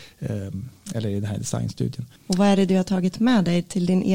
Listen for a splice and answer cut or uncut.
cut